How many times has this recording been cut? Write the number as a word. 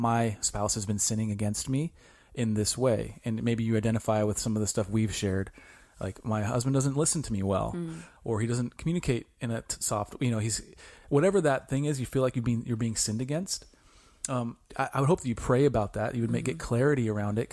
one